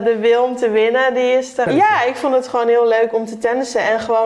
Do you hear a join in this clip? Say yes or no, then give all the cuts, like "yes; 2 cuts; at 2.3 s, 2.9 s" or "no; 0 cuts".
yes; 1 cut; at 1.7 s